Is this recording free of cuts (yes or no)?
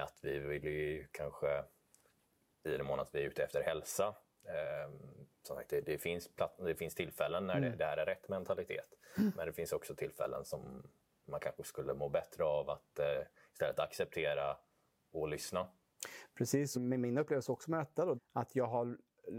no